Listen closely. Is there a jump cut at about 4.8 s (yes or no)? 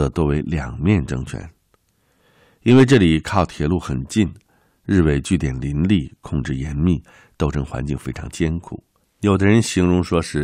no